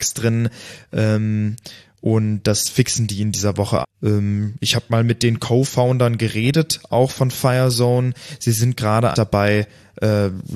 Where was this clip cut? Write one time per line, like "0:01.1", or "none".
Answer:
0:03.8
0:09.1